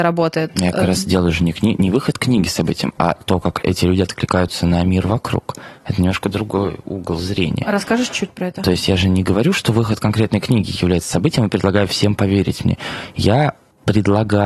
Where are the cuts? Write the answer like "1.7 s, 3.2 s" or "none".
none